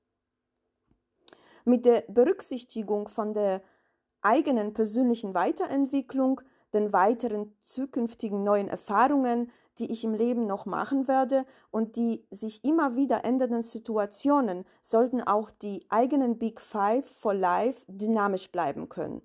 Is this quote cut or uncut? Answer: uncut